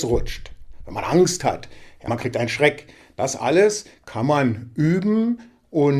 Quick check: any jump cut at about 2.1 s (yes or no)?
yes